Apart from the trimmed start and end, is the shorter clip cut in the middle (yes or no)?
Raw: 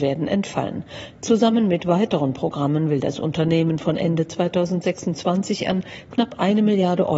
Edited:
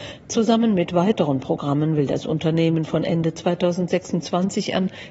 no